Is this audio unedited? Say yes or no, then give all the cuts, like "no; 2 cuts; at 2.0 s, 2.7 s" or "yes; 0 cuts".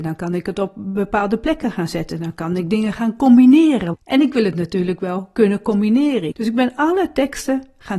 no; 2 cuts; at 3.9 s, 6.3 s